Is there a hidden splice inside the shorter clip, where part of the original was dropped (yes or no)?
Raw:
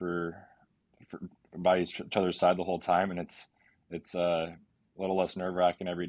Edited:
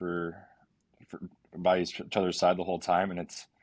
no